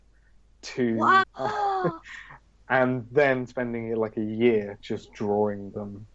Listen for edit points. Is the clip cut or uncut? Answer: cut